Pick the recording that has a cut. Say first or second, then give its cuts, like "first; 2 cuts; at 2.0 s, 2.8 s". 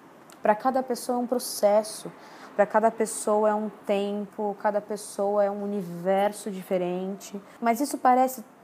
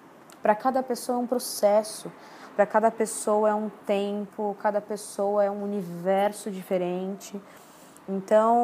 first; 1 cut; at 7.6 s